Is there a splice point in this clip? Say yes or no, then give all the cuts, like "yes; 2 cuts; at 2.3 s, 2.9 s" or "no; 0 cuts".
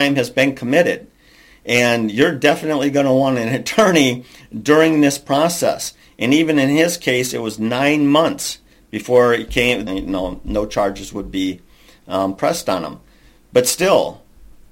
yes; 1 cut; at 9.9 s